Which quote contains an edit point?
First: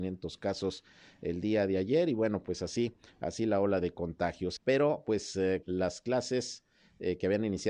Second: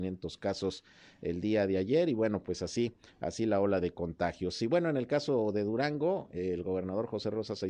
first; 2 cuts; at 4.6 s, 5.6 s

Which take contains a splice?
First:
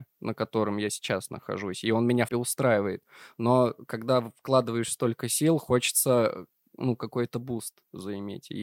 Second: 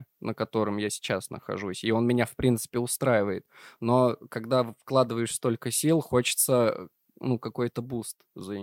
first; 1 cut; at 2.3 s

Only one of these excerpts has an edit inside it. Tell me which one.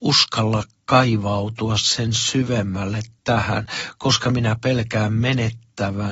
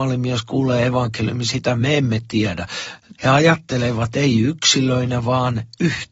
second; 1 cut; at 3.2 s

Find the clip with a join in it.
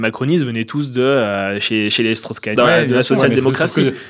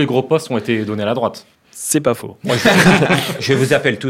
first; 1 cut; at 2.6 s

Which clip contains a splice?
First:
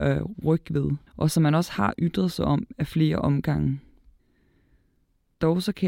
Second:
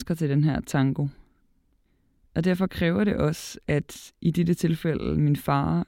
first; 1 cut; at 1.1 s

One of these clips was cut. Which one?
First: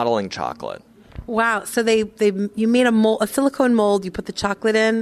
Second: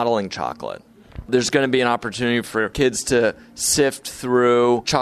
second; 1 cut; at 1.3 s

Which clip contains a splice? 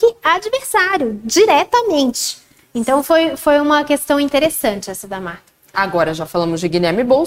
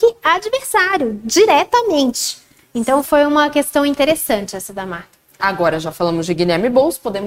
second; 1 cut; at 3.0 s

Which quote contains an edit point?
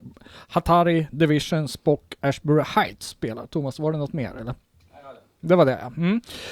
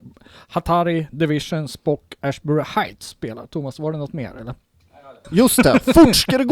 second; 1 cut; at 5.2 s

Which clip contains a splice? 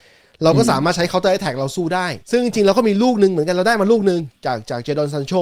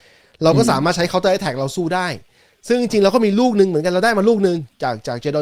first; 1 cut; at 2.2 s

